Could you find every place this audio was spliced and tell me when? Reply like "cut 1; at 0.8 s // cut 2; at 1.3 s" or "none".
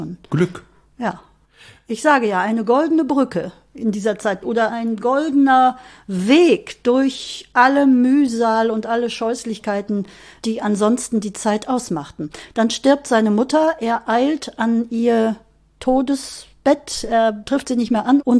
none